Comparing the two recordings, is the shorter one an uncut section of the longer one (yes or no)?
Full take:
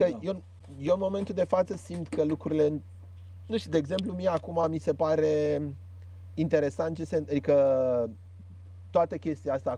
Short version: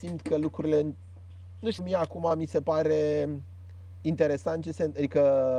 no